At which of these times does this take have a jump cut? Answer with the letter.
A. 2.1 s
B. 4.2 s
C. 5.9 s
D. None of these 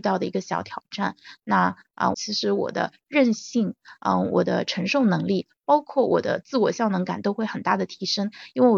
A